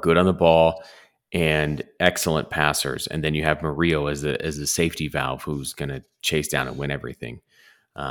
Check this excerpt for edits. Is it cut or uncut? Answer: uncut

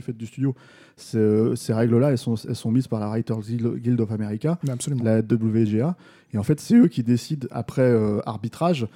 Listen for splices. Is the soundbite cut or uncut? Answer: uncut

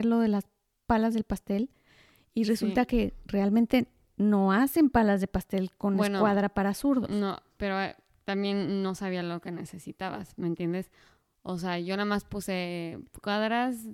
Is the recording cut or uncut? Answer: uncut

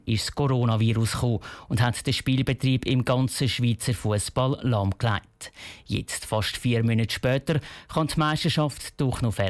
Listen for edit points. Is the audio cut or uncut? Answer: uncut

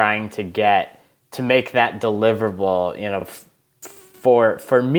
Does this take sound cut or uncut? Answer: uncut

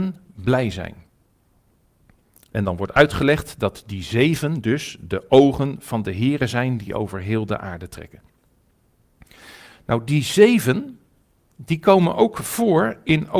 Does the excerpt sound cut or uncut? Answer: uncut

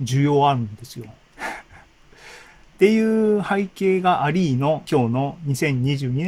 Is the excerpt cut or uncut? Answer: cut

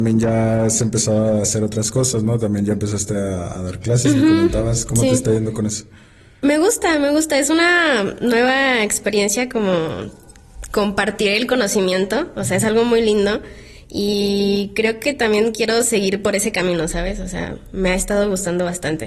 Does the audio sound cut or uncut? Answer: uncut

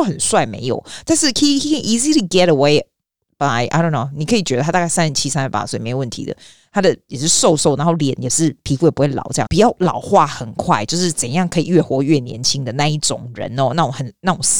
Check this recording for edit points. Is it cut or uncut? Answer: cut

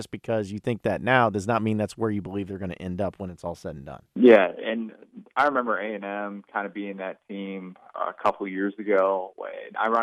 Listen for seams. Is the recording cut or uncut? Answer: cut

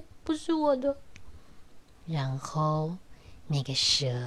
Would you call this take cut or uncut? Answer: uncut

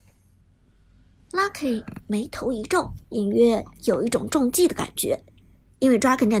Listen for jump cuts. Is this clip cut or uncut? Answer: cut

